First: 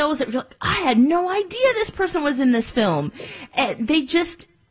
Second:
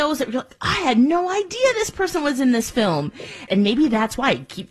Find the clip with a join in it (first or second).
second